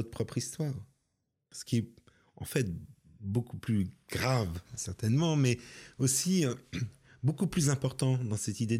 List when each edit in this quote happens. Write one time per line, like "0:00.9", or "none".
0:01.5